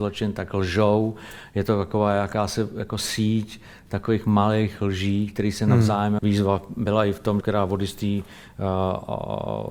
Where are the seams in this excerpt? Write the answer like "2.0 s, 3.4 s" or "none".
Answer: 6.2 s, 7.4 s